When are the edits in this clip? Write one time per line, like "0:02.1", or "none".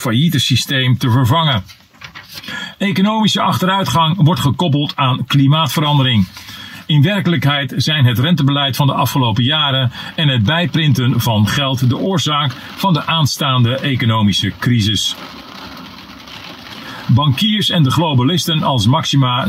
0:17.1